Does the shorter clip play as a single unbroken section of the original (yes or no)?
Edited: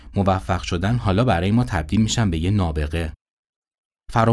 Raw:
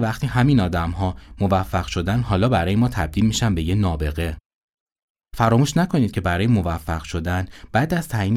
yes